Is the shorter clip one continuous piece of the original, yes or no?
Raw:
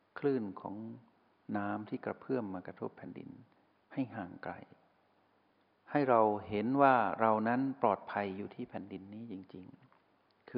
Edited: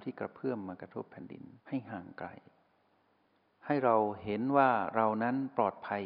no